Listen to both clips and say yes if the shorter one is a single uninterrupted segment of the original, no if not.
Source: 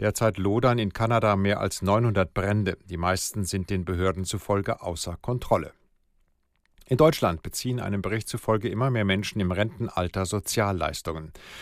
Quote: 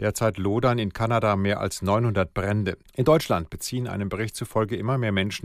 no